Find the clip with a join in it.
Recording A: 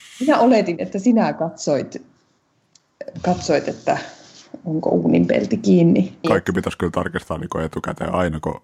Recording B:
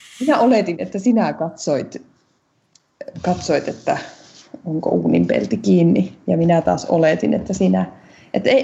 A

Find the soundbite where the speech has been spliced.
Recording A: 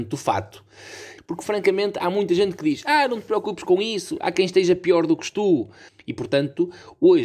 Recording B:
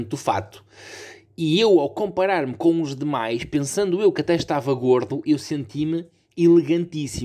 A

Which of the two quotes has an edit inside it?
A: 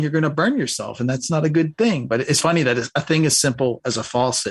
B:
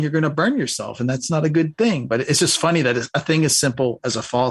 A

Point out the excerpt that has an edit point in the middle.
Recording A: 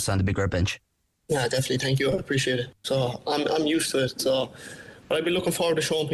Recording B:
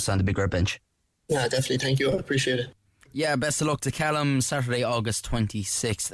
A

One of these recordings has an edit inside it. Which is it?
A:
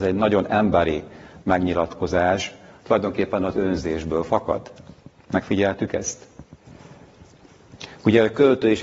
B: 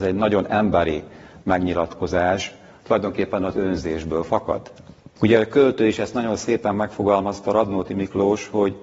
B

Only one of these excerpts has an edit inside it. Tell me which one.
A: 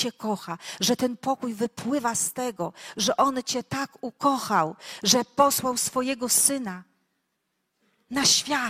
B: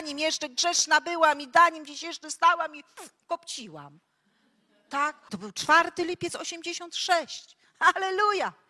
B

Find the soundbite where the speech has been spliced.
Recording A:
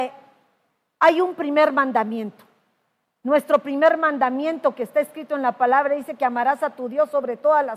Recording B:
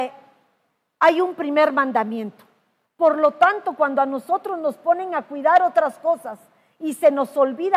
B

